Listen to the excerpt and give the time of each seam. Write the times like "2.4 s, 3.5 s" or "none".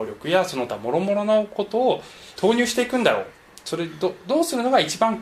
2.4 s